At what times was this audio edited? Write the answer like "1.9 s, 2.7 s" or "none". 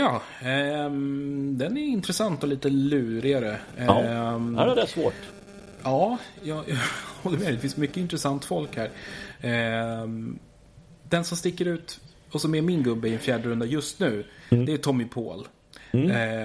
none

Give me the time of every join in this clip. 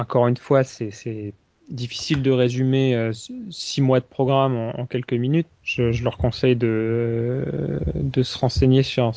5.5 s

